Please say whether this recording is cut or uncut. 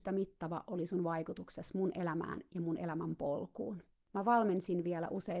cut